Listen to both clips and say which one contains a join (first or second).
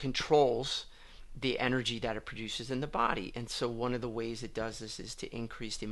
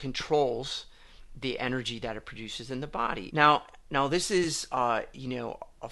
second